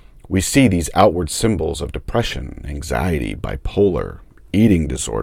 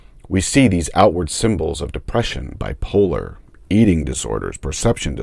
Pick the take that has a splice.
second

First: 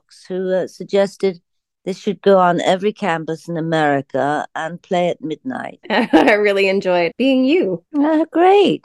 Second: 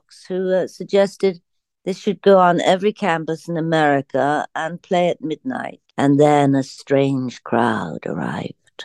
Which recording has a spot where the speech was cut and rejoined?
first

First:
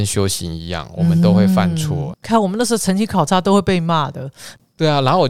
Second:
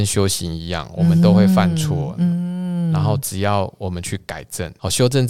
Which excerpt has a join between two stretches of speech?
first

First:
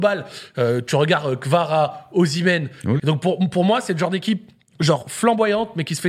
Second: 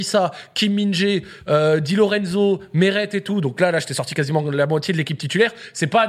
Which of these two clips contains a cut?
first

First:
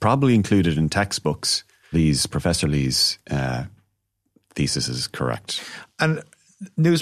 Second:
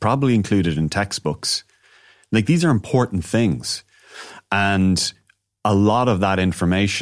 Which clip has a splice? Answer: first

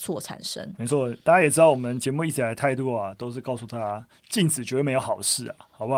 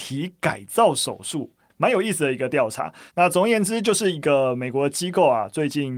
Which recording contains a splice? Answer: second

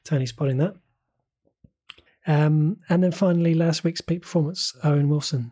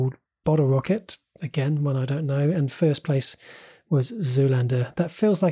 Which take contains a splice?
first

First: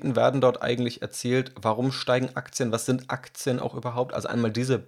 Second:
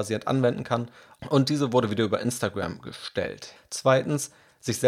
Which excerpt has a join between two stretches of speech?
second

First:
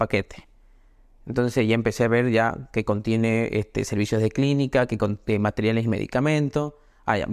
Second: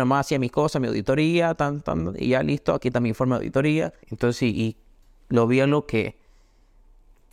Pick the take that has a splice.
second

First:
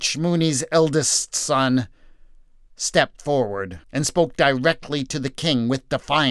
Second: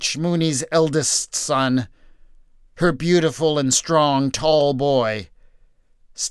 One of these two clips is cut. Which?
first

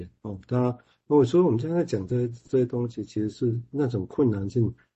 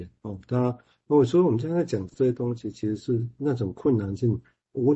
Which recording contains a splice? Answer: second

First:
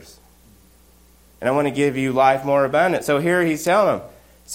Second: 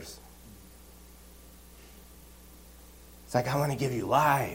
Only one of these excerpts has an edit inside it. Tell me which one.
first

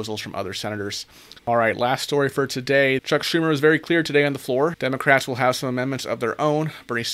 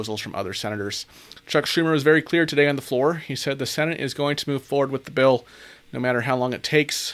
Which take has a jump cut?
first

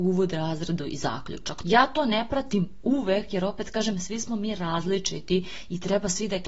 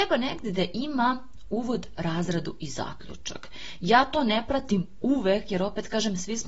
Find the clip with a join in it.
first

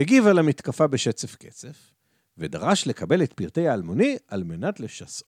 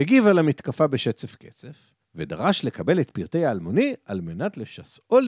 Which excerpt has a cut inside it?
second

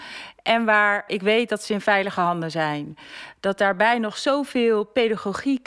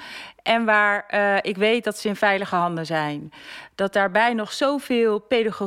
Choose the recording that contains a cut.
first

